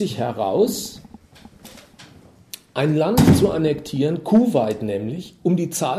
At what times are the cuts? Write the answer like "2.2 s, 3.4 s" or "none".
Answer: none